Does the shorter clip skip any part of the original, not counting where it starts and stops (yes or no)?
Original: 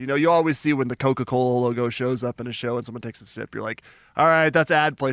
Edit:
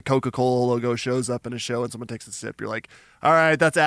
no